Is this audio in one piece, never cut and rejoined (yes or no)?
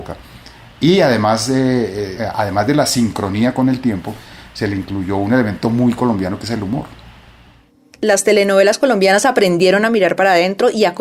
yes